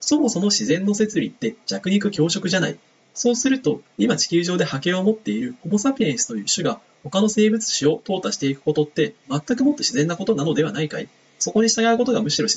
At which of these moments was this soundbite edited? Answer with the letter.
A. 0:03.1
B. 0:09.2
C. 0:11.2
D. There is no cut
B